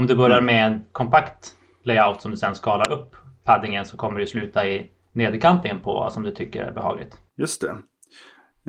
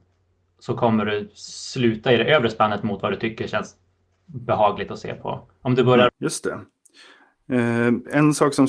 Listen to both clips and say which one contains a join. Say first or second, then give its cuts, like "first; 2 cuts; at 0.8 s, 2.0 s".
second; 1 cut; at 6.1 s